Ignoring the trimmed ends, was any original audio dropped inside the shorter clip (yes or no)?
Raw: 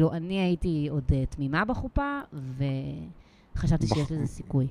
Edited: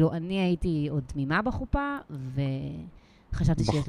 yes